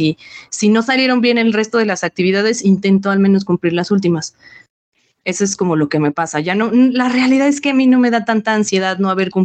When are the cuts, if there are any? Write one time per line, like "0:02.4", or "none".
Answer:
none